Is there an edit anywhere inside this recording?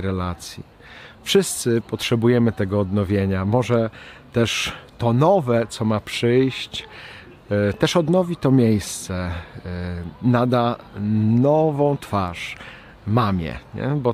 no; 0 cuts

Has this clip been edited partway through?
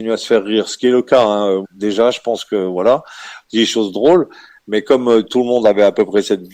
yes; 2 cuts; at 1.6 s, 3.4 s

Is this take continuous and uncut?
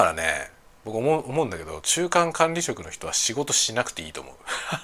no; 1 cut; at 1.8 s

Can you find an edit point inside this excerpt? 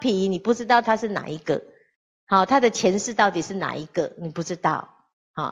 no; 0 cuts

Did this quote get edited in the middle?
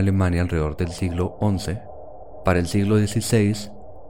no; 0 cuts

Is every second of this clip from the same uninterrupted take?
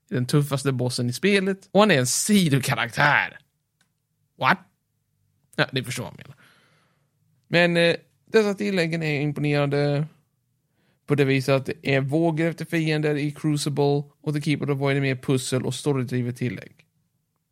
yes; 0 cuts

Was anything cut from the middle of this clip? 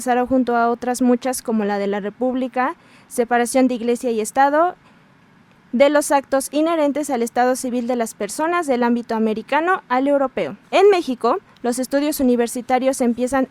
yes; 1 cut; at 10.7 s

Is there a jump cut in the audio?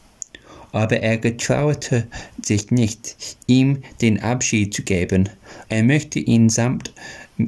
yes; 1 cut; at 5.6 s

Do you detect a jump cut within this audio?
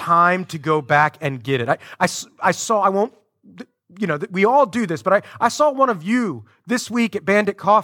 no; 0 cuts

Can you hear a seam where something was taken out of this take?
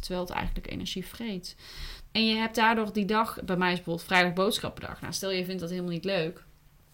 yes; 1 cut; at 2.1 s

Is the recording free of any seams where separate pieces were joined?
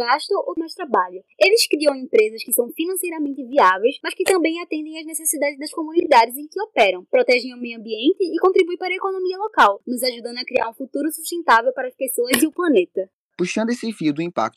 yes; 0 cuts

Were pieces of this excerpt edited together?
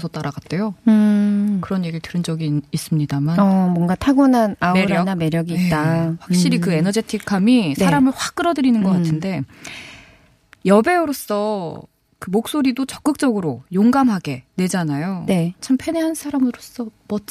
yes; 1 cut; at 14.5 s

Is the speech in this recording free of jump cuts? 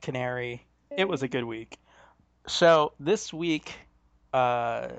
no; 1 cut; at 0.9 s

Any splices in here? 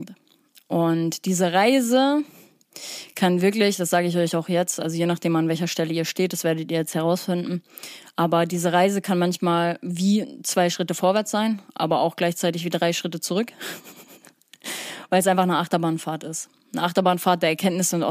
no; 0 cuts

